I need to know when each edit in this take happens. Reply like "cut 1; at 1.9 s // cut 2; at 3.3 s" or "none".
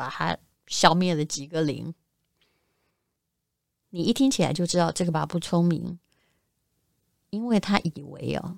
cut 1; at 5.1 s